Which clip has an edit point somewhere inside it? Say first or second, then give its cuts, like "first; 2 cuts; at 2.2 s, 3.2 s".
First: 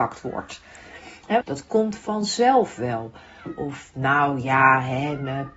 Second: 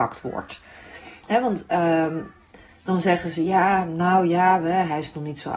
first; 1 cut; at 1.4 s